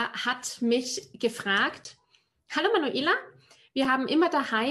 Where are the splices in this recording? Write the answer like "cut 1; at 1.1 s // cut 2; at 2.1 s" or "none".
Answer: none